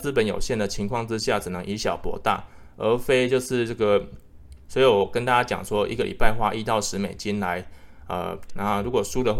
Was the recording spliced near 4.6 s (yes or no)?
yes